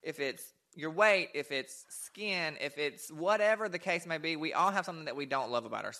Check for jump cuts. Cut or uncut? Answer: uncut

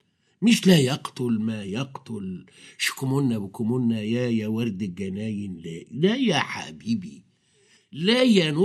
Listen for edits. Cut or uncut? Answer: uncut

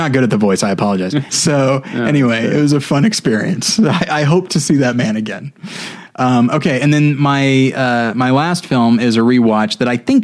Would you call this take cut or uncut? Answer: cut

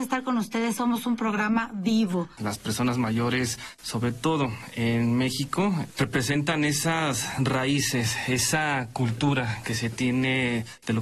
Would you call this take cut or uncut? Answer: cut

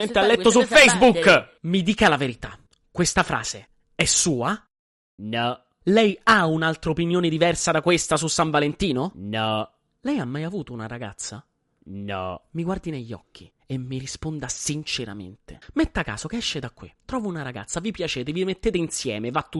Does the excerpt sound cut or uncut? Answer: uncut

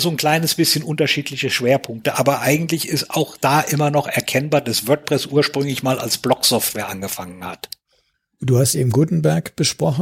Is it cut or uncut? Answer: uncut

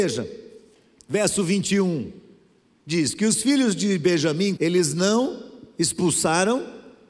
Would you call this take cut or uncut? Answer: cut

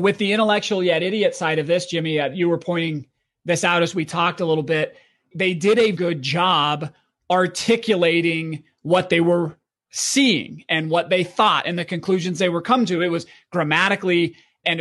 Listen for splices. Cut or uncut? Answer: cut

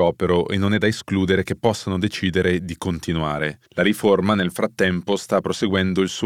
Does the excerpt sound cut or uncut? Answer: cut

